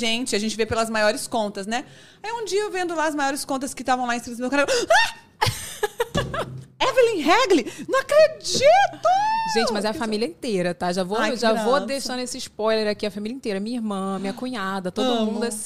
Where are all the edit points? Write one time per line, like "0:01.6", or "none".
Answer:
none